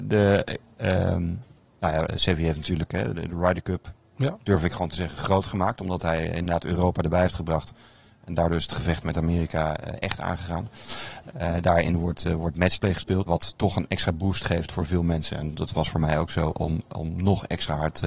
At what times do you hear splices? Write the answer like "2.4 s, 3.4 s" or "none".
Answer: 2.1 s, 13.3 s, 16.5 s